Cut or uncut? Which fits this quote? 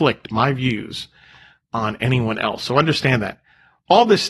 uncut